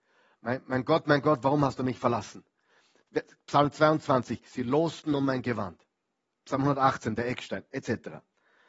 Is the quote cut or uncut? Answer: cut